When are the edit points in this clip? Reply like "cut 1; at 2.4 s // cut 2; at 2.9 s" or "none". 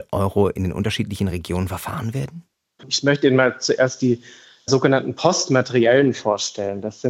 cut 1; at 2.8 s